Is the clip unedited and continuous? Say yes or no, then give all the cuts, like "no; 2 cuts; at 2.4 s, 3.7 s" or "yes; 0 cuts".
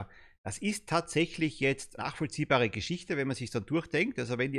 no; 1 cut; at 2.0 s